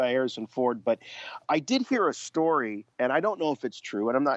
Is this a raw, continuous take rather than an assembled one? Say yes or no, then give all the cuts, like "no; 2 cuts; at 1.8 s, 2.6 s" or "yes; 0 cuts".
no; 2 cuts; at 1.4 s, 2.9 s